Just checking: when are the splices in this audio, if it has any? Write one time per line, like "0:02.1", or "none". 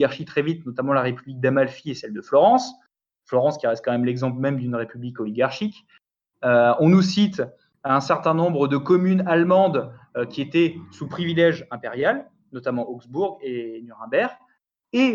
none

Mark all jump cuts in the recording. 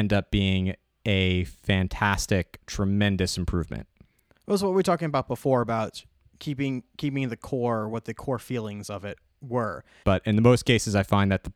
0:10.0

